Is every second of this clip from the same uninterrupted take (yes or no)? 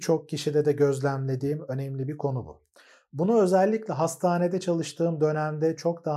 yes